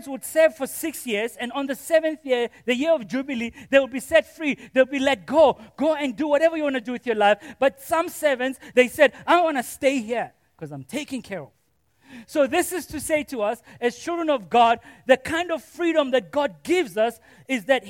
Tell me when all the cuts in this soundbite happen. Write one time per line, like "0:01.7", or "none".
0:08.7